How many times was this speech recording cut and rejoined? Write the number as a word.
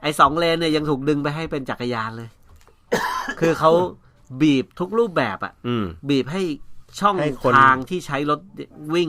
one